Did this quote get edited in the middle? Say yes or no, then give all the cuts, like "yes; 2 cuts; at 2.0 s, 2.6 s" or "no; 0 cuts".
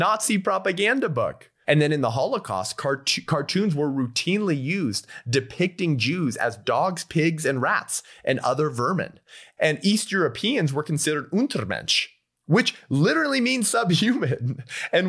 yes; 2 cuts; at 1.6 s, 9.6 s